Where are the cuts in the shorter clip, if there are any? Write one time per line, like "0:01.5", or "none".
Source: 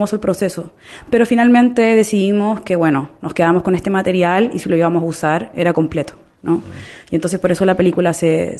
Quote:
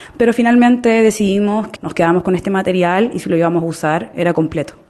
0:01.8